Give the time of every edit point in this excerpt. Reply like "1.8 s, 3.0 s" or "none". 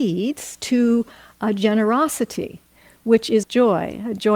3.4 s